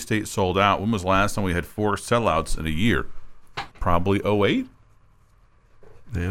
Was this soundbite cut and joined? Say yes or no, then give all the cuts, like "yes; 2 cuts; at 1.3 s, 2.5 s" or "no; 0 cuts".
yes; 1 cut; at 3.7 s